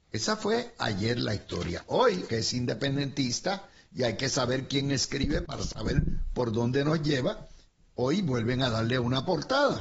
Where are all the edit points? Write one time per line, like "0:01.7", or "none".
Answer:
0:02.3